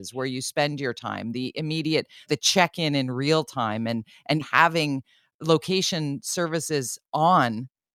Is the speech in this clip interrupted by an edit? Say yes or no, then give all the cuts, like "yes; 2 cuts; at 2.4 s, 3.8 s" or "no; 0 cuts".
yes; 2 cuts; at 2.2 s, 4.4 s